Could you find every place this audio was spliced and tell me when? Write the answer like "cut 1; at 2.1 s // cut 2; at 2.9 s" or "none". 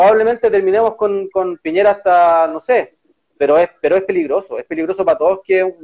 none